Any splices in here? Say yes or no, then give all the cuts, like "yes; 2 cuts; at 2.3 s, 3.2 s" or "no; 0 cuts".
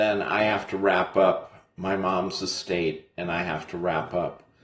no; 0 cuts